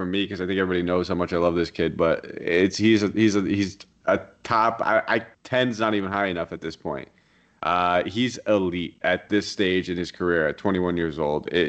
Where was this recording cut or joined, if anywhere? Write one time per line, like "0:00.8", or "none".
0:05.3
0:09.0